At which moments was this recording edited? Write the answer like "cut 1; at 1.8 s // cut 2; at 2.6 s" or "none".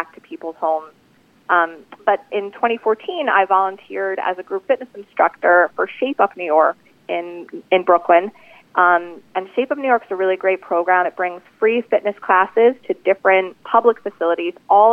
none